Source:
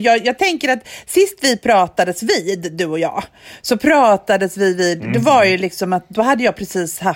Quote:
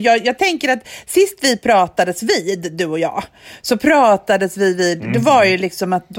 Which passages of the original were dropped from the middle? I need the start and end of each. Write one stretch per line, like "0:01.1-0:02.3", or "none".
none